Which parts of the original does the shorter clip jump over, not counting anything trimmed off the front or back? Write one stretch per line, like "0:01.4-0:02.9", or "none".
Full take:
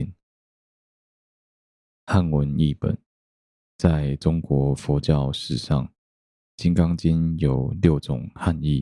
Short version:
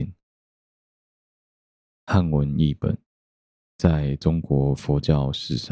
none